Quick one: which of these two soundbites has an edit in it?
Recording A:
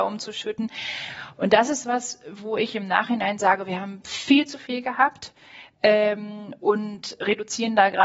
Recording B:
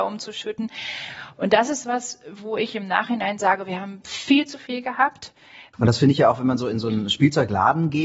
B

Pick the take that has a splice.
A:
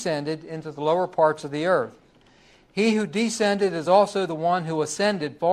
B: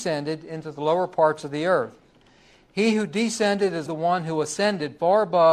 B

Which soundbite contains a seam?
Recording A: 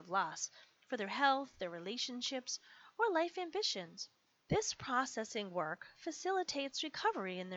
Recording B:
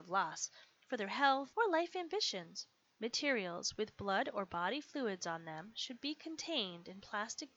B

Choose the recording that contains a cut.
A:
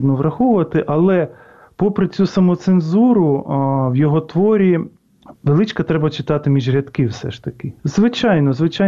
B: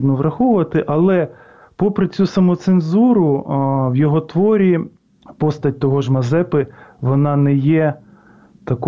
A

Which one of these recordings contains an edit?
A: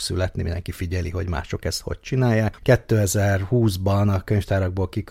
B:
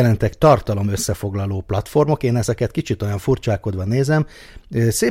A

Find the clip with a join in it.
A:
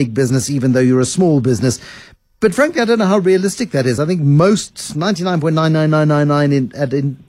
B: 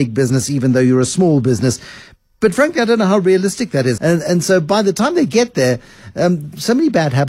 B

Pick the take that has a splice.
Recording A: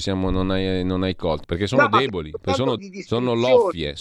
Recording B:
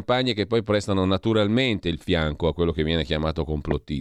A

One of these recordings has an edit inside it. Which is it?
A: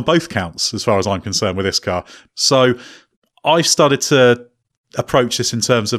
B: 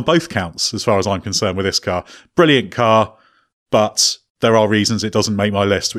A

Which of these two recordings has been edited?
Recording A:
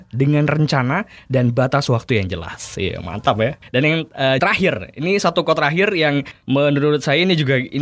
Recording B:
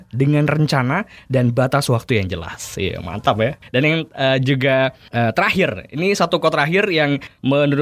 A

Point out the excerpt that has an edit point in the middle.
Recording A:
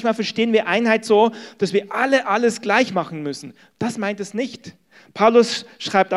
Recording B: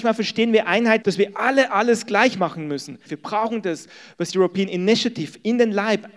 B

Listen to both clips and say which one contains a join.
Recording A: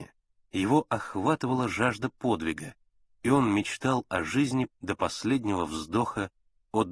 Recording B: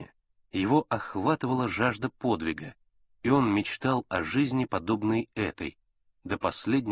A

